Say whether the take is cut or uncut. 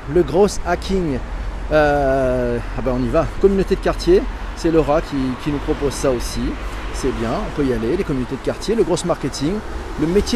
uncut